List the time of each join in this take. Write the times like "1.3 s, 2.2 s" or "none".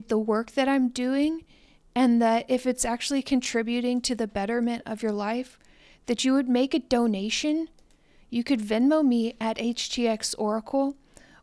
none